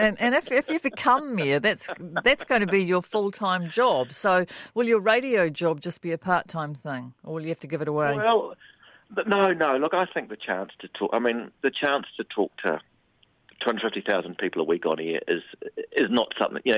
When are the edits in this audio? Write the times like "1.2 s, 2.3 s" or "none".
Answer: none